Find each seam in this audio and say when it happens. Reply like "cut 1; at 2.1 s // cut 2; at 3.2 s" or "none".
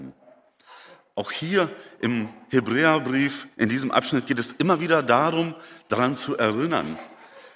none